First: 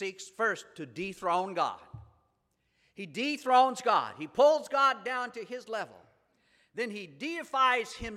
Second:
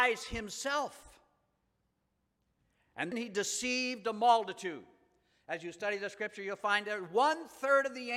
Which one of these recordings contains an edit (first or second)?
second